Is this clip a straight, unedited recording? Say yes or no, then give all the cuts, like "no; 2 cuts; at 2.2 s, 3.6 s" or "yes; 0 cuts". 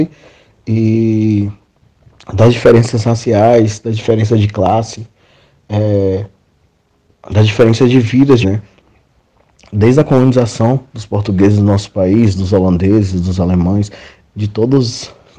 no; 2 cuts; at 8.4 s, 14.2 s